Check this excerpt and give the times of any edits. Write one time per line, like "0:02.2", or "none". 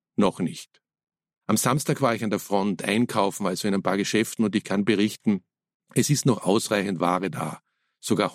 none

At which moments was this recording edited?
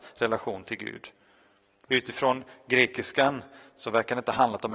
0:01.8

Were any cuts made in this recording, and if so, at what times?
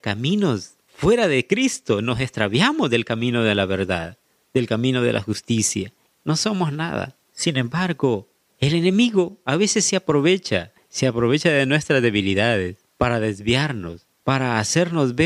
0:06.1
0:12.9

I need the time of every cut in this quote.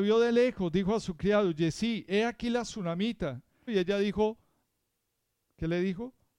0:03.7

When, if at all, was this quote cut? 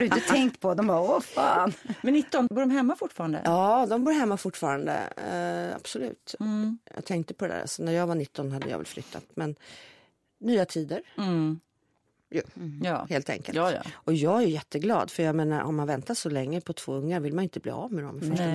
0:02.5
0:06.4

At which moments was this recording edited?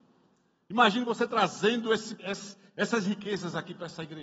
0:02.2

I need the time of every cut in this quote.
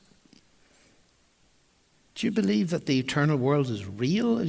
0:02.1

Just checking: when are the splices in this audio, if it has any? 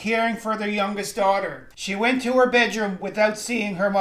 0:01.7

